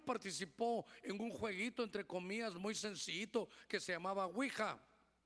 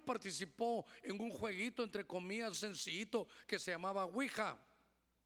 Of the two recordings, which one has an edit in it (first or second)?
second